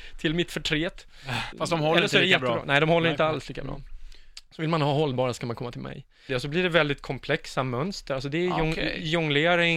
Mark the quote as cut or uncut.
cut